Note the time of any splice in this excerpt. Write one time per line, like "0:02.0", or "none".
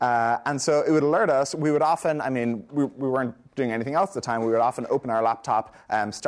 none